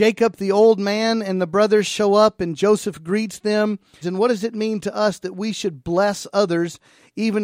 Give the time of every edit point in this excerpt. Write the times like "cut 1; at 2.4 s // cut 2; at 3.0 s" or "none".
cut 1; at 4.0 s